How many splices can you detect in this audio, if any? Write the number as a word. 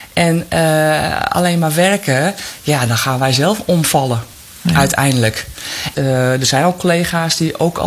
one